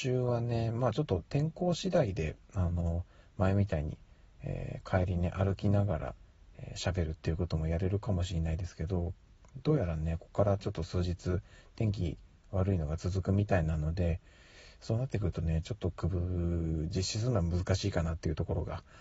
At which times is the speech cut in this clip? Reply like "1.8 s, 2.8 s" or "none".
none